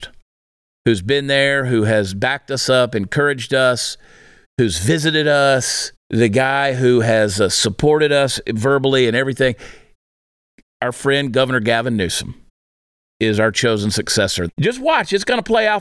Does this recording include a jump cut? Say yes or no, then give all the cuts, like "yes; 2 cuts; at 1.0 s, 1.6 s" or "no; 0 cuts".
yes; 2 cuts; at 6.0 s, 14.5 s